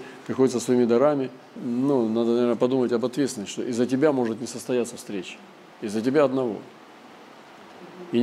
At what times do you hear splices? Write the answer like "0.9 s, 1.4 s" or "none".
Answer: 1.6 s